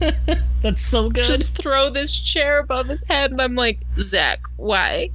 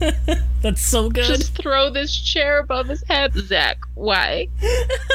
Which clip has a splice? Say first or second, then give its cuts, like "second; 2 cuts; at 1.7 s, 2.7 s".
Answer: second; 1 cut; at 3.3 s